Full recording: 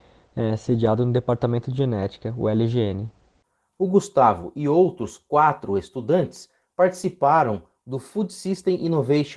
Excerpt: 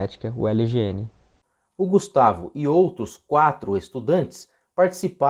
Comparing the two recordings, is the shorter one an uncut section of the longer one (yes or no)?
yes